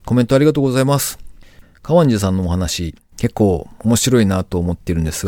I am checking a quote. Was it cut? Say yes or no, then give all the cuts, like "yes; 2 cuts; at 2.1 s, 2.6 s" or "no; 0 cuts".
yes; 1 cut; at 3.0 s